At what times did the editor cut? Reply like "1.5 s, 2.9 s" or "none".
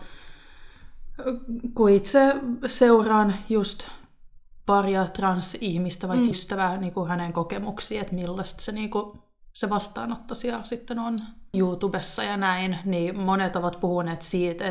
6.3 s, 11.5 s